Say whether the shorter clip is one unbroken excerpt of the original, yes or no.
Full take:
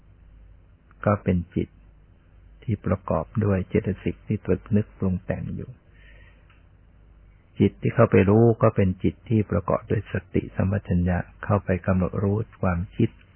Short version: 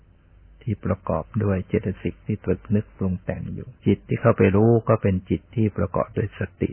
no